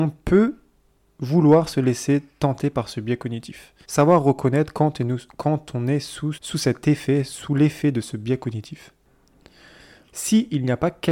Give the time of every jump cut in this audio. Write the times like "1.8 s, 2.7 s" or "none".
3.8 s, 6.3 s, 10.1 s